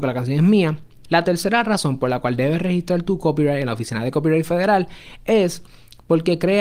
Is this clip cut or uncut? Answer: cut